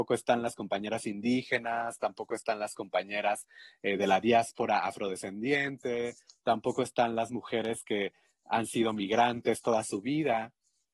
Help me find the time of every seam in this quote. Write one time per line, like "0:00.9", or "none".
none